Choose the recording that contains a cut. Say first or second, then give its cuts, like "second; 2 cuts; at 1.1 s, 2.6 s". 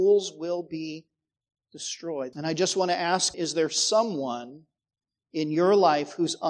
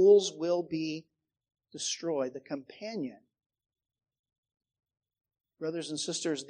first; 2 cuts; at 2.3 s, 3.3 s